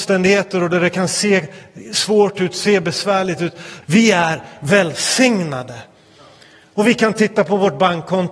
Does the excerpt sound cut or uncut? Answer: cut